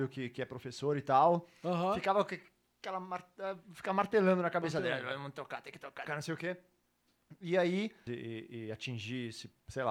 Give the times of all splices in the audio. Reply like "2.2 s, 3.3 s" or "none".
6.1 s, 8.1 s